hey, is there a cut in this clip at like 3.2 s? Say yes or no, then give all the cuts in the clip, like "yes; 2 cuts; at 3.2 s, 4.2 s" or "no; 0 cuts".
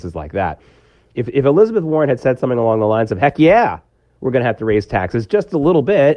no; 0 cuts